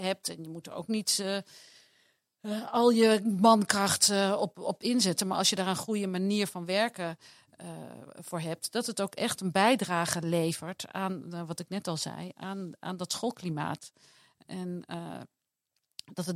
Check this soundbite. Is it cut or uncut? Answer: uncut